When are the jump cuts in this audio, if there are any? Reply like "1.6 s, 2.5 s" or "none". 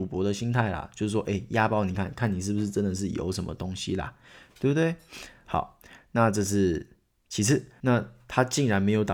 1.9 s, 7.8 s

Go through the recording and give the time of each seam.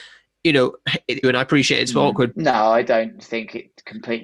1.2 s, 2.3 s

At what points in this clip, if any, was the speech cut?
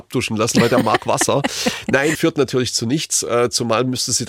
2.1 s

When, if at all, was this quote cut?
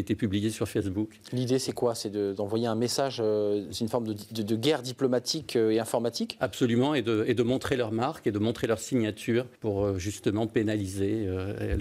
9.6 s

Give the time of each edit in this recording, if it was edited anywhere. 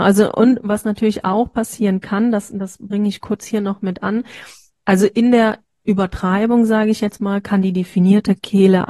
none

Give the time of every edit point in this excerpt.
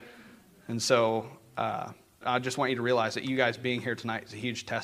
2.2 s

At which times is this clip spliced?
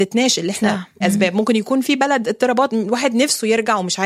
1.0 s

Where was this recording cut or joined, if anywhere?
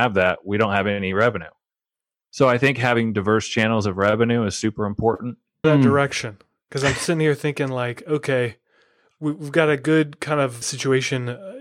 5.6 s, 10.6 s

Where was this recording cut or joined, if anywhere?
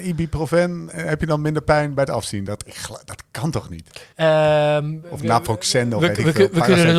4.1 s

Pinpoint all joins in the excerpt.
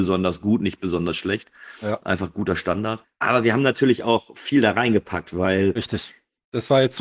none

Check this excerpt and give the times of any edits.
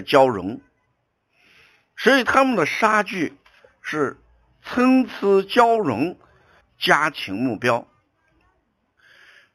6.6 s

